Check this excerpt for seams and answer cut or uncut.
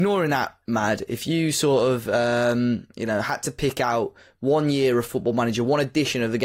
uncut